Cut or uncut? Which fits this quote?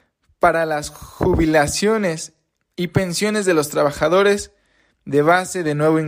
uncut